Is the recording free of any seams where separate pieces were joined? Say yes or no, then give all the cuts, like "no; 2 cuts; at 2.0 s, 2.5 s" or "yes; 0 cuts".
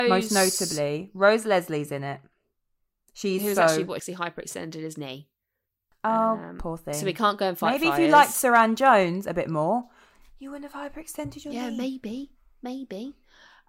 no; 1 cut; at 4.0 s